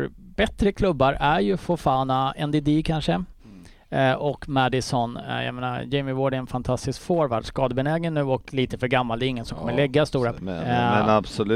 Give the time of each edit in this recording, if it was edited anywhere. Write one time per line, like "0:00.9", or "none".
0:10.4